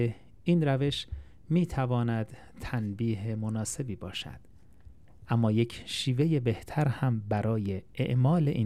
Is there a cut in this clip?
no; 0 cuts

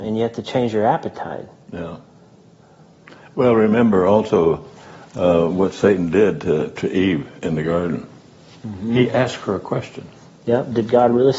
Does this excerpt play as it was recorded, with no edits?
yes; 0 cuts

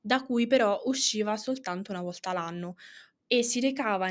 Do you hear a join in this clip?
yes; 1 cut; at 3.2 s

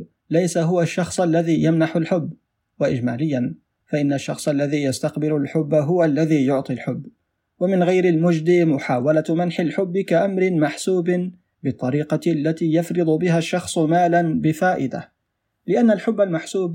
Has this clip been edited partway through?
no; 0 cuts

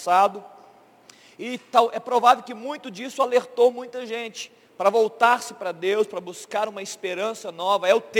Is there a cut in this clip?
no; 0 cuts

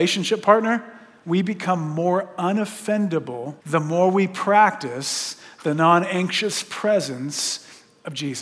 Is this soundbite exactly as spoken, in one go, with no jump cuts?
no; 2 cuts; at 1.2 s, 3.6 s

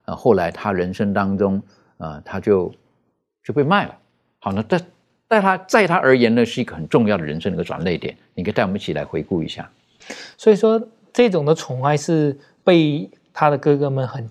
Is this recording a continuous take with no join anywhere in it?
no; 1 cut; at 10.3 s

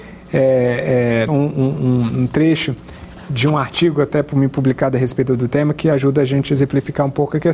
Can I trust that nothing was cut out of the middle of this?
no; 1 cut; at 1.3 s

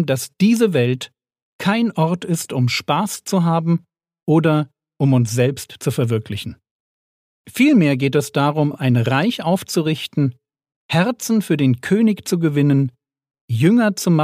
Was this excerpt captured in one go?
yes; 0 cuts

